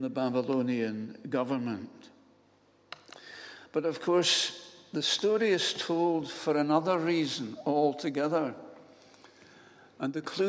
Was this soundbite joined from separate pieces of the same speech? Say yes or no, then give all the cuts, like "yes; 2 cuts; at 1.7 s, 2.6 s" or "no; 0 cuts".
no; 0 cuts